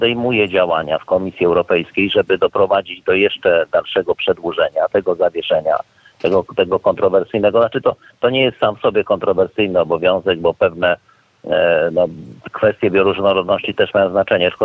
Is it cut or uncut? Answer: uncut